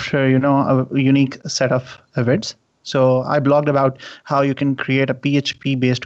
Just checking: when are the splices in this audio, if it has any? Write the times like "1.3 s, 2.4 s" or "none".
none